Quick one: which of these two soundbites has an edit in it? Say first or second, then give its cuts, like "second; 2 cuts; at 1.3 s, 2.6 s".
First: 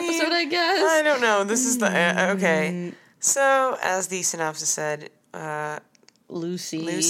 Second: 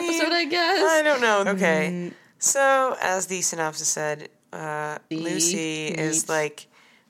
second; 2 cuts; at 1.5 s, 5.1 s